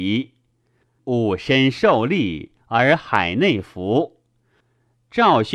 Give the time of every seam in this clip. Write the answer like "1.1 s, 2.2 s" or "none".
1.0 s